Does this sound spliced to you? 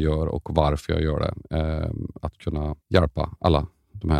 yes; 1 cut; at 2.8 s

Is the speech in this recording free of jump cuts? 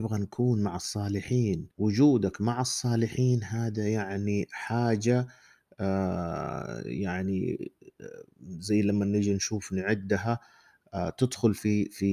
no; 1 cut; at 1.7 s

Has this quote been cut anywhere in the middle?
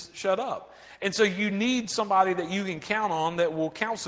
no; 0 cuts

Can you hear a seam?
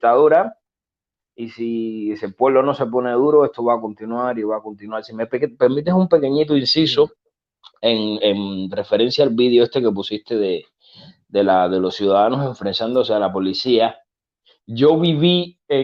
yes; 1 cut; at 8.2 s

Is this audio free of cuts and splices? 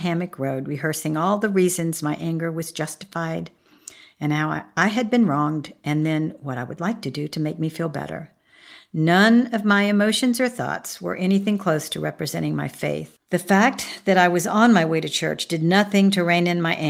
no; 1 cut; at 13.2 s

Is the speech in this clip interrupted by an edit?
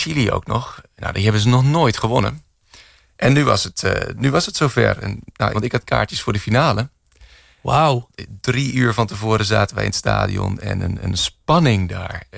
yes; 1 cut; at 5.5 s

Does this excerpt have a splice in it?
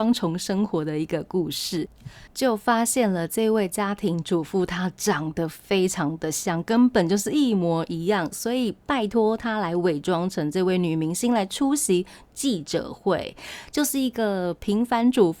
yes; 1 cut; at 2.3 s

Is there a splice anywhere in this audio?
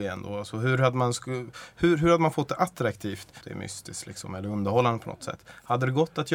yes; 1 cut; at 3.4 s

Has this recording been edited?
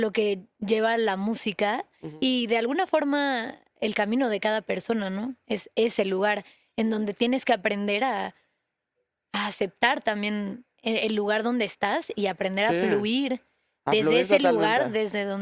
no; 0 cuts

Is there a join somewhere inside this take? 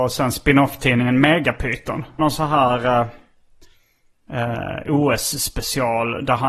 yes; 1 cut; at 2.2 s

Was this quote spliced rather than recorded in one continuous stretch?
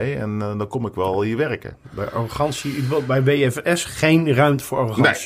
no; 0 cuts

